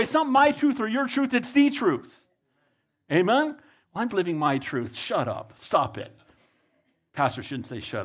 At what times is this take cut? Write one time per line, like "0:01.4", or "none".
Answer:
0:04.1